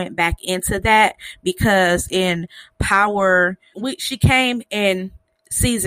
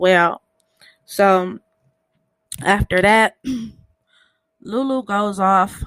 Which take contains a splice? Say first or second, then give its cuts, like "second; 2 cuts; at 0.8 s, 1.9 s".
first; 1 cut; at 3.7 s